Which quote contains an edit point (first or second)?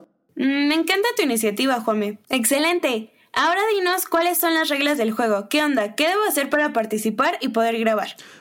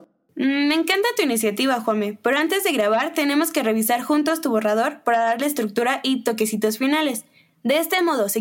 first